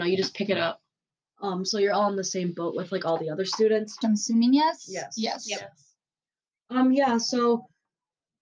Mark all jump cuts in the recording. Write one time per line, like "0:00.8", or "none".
0:01.2
0:04.0